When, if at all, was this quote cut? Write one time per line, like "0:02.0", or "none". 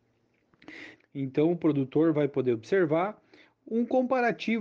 0:01.0